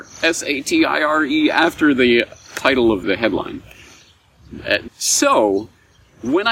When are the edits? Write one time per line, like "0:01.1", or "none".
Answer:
0:03.0
0:04.9